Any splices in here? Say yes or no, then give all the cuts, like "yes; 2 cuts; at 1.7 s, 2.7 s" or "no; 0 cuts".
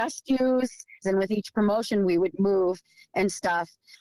yes; 1 cut; at 1.0 s